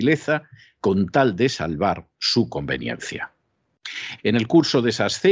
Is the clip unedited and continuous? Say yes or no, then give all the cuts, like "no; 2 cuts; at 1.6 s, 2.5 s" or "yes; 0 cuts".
no; 1 cut; at 4.2 s